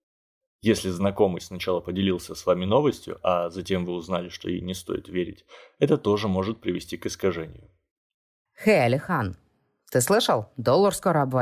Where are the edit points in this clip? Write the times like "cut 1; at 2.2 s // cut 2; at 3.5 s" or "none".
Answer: none